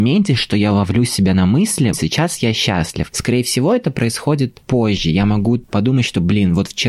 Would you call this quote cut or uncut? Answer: cut